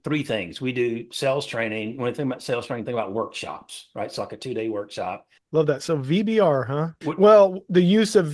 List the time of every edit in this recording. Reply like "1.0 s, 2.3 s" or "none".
5.4 s, 7.0 s